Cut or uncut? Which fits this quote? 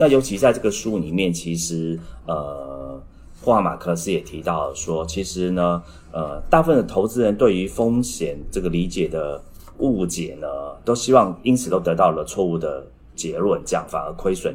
uncut